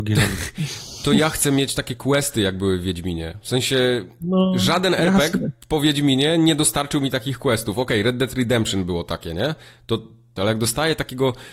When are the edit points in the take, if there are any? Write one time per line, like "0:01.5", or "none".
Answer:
0:10.4